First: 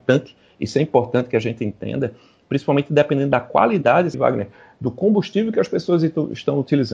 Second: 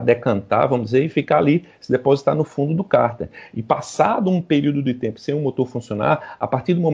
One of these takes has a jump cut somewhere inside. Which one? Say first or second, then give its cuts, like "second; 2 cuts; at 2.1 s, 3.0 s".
first; 1 cut; at 4.1 s